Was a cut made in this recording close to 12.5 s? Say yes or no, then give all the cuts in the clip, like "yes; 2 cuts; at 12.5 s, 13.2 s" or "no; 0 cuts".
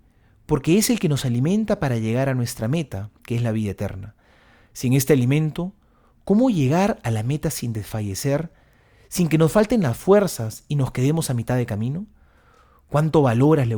no; 0 cuts